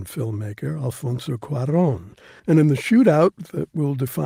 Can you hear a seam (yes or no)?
yes